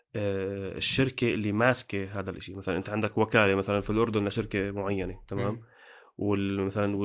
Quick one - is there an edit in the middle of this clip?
no; 0 cuts

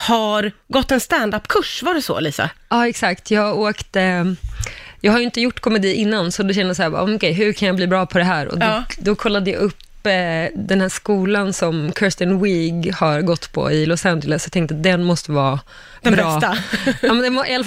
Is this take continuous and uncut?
yes; 0 cuts

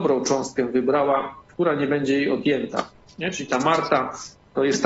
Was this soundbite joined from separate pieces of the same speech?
no; 0 cuts

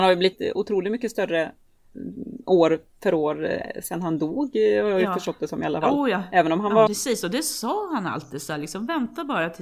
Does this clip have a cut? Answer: yes; 1 cut; at 6.9 s

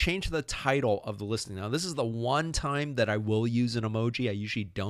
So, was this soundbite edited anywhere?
no; 0 cuts

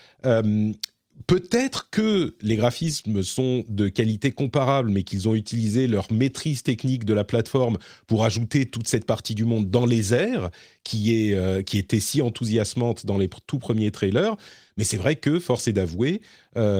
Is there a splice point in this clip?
no; 0 cuts

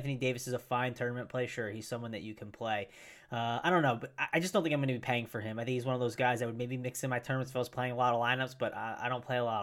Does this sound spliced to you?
no; 0 cuts

